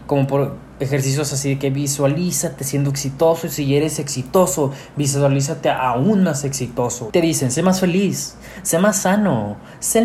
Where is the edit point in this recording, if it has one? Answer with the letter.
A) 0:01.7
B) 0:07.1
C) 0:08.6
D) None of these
B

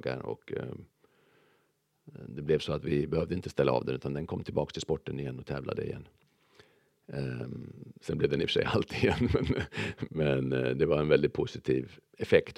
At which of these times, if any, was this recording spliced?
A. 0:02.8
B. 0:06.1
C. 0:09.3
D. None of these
D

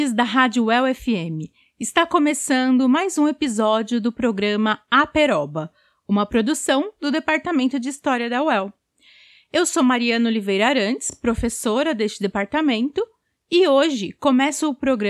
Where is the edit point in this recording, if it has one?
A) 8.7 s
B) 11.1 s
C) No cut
C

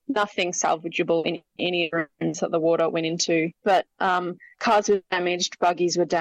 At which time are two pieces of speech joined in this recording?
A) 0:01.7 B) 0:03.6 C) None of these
B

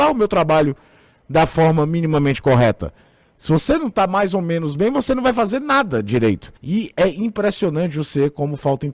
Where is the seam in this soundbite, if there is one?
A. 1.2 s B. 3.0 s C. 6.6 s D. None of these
C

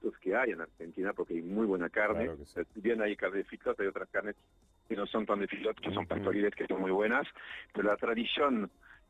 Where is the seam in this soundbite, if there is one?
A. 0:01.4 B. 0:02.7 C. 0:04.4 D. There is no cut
D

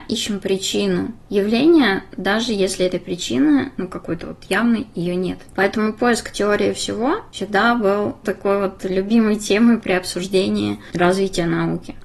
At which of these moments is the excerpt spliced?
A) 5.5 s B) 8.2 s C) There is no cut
B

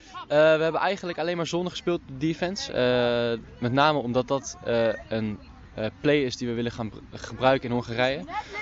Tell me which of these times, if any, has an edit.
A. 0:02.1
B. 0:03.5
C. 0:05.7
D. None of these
D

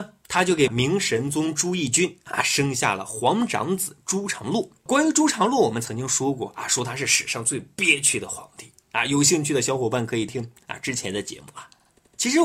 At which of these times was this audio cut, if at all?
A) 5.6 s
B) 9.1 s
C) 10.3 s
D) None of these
C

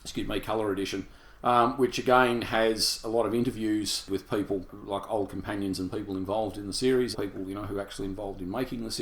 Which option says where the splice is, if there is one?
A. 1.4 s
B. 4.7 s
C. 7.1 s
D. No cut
C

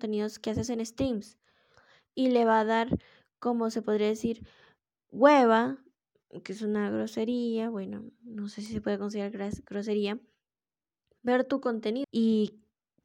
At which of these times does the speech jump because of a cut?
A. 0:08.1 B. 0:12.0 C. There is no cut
B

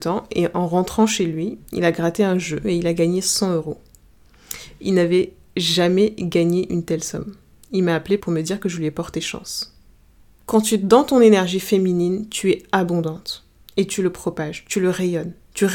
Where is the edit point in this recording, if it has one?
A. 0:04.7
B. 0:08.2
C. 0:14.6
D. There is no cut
B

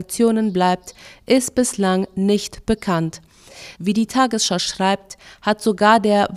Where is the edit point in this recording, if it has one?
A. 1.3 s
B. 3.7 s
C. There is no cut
B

